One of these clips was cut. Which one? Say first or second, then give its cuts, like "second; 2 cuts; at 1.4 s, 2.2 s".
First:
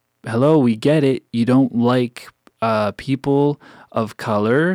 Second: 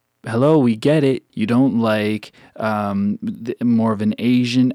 second; 1 cut; at 1.3 s